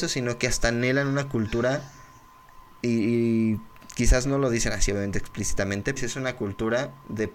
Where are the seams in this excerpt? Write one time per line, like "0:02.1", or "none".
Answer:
0:06.0